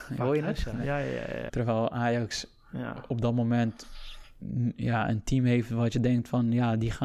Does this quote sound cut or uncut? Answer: cut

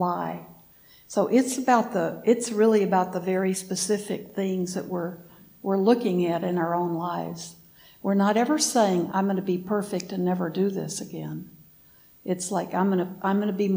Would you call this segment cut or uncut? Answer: cut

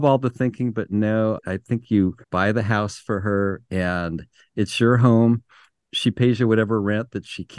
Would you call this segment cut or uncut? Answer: cut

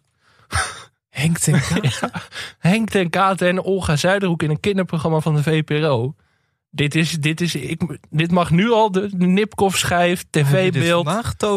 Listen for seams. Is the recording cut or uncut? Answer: uncut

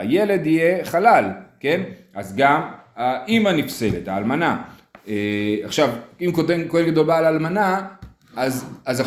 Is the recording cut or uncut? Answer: uncut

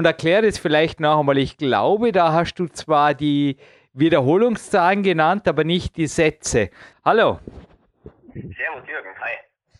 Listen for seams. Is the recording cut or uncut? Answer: cut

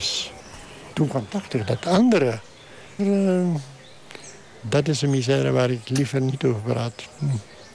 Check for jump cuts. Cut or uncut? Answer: cut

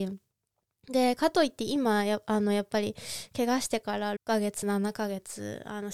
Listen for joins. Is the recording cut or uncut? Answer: cut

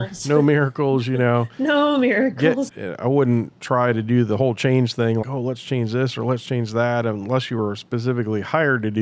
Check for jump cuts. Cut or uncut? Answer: cut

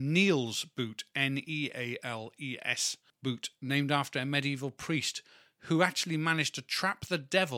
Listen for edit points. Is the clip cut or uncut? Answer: uncut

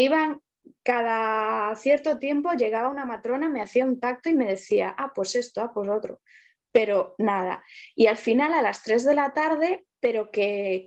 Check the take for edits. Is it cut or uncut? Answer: cut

